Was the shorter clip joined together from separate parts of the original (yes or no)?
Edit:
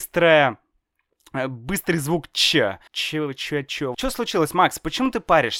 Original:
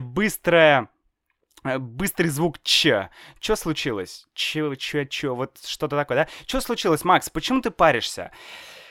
yes